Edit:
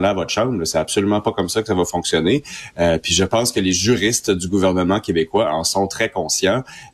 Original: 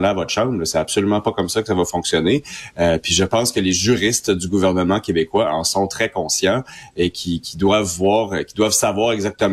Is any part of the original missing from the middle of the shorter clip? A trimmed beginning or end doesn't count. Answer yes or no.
no